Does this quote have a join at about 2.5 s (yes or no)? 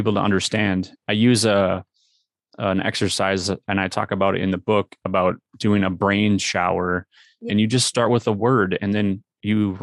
no